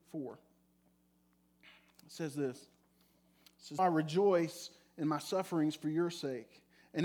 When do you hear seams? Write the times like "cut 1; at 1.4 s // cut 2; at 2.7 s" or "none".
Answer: cut 1; at 3.8 s